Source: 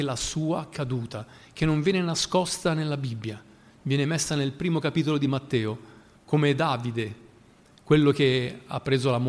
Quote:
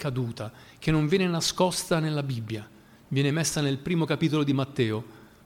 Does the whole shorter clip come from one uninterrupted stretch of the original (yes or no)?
yes